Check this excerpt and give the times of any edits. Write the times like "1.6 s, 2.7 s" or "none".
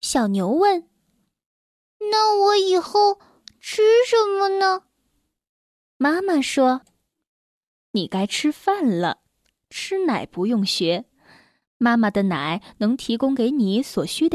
none